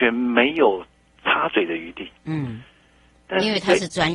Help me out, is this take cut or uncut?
uncut